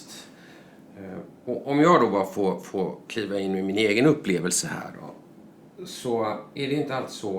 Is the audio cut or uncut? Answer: uncut